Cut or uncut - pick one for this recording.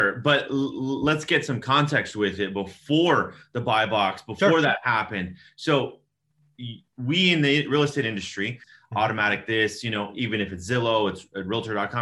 cut